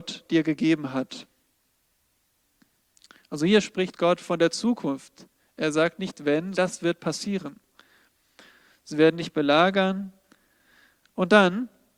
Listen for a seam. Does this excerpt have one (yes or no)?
yes